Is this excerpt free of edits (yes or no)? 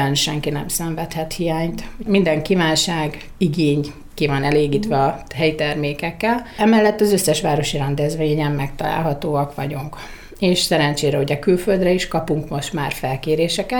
yes